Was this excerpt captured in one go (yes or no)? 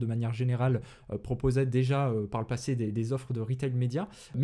yes